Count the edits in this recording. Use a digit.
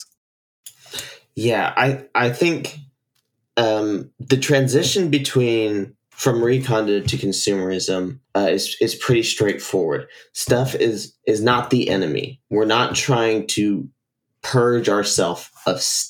1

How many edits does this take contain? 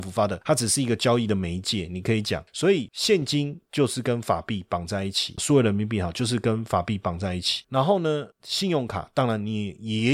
1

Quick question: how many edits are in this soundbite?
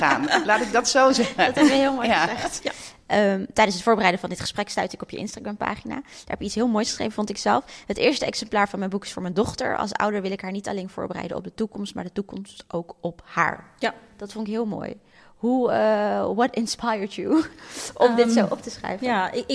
1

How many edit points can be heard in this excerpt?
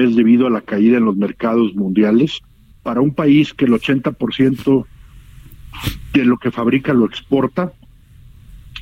1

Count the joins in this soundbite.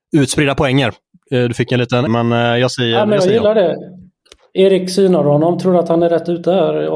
1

